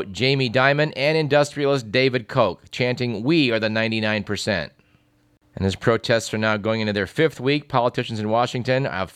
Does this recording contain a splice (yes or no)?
no